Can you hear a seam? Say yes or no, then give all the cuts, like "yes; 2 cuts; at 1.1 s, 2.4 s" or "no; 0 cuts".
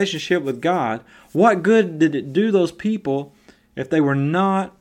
no; 0 cuts